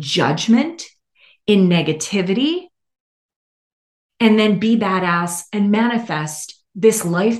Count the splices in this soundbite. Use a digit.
0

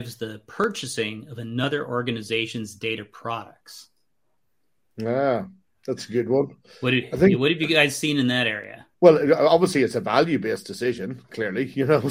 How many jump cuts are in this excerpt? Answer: 1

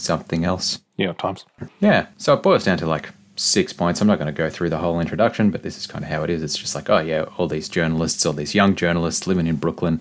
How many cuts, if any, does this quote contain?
1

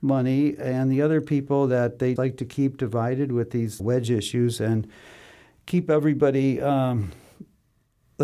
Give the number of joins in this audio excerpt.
2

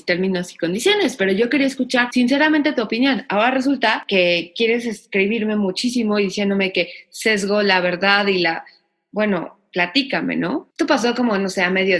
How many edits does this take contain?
1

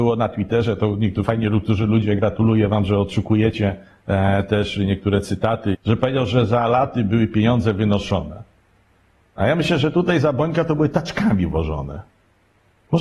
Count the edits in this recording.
1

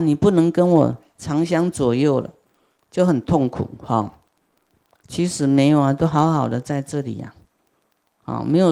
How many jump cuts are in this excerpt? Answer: 0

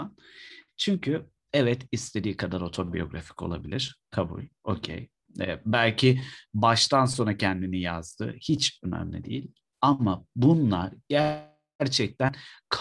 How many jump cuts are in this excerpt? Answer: 0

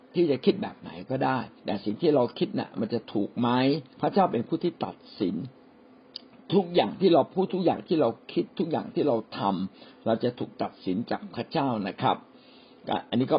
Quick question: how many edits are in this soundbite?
2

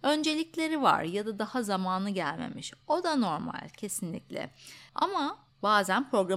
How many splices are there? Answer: 1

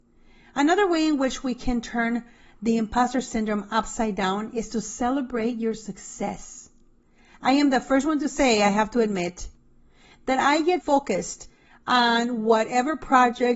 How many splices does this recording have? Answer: 1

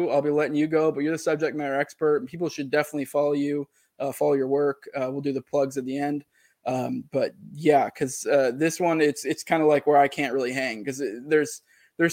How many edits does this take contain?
0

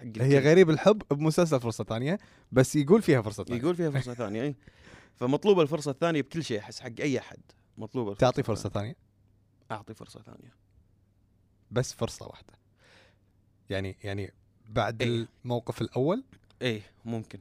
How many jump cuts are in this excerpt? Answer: 0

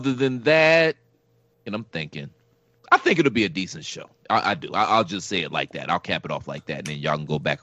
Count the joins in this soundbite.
1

